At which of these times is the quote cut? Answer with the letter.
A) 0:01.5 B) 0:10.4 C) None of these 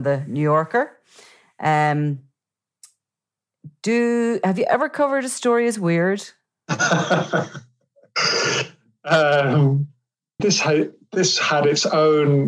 B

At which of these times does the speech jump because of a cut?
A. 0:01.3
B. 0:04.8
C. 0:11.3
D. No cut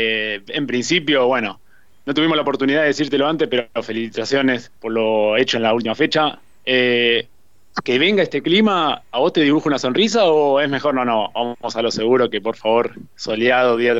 B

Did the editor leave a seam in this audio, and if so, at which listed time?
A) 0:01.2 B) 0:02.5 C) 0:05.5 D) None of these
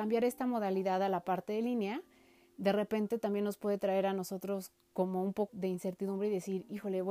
C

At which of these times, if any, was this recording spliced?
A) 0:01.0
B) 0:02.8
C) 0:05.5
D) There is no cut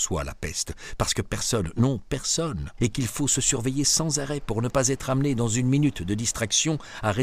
B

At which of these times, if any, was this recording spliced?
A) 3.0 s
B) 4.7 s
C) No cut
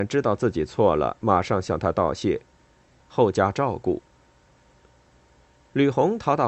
A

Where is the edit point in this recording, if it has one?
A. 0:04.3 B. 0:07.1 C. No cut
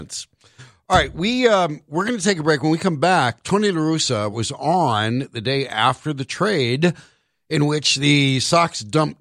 A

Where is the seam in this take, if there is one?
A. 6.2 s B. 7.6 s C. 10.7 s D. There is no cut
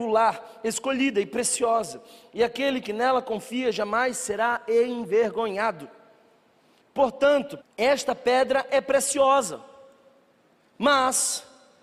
B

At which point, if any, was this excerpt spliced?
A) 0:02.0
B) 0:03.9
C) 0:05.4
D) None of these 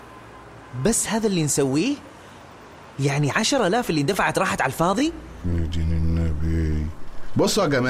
C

